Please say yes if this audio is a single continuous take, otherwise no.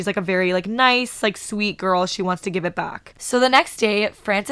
yes